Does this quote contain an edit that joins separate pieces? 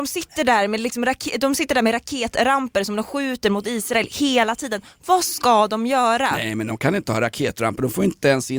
no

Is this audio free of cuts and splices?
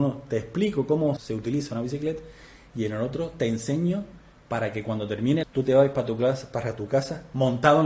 no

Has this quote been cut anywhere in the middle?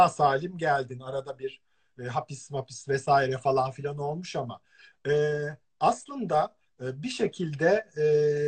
no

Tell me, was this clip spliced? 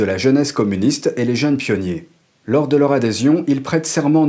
no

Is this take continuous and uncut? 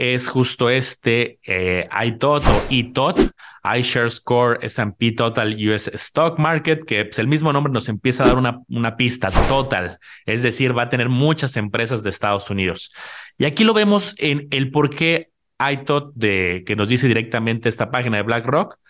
yes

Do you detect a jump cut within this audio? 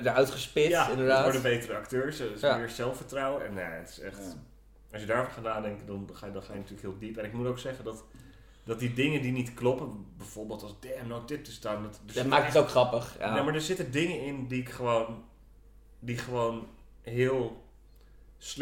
no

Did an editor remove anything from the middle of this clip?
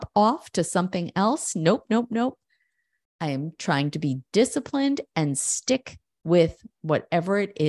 no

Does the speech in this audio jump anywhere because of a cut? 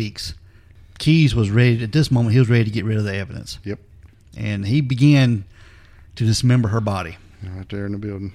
no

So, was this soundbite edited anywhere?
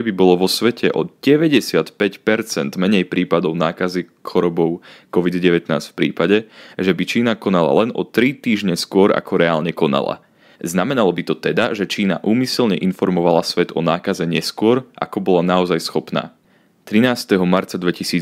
yes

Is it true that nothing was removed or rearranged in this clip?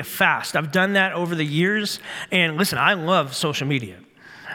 yes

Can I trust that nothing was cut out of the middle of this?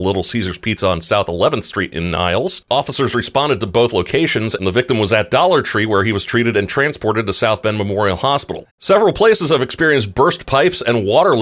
no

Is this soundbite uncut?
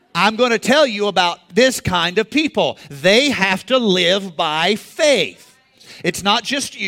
yes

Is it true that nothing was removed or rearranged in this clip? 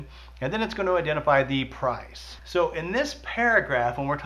no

